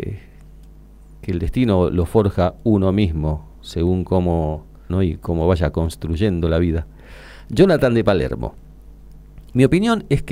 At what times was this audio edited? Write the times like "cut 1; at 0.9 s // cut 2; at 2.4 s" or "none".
cut 1; at 4.9 s